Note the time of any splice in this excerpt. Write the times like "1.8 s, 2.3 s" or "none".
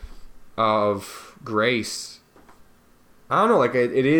none